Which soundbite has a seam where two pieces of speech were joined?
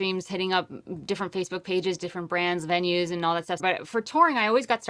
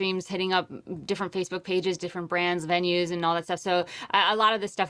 first; 1 cut; at 3.6 s

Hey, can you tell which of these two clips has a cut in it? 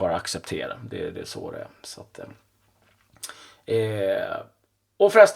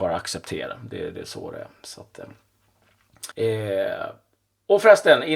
second; 1 cut; at 3.3 s

